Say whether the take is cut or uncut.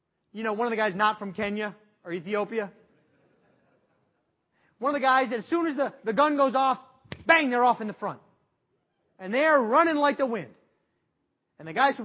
uncut